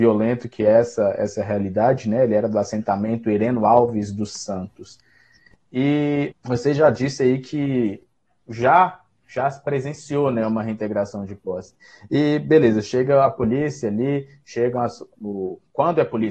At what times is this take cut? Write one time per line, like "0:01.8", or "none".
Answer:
0:06.3